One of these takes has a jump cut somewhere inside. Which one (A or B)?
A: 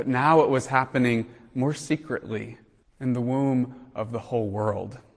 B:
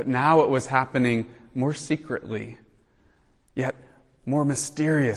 A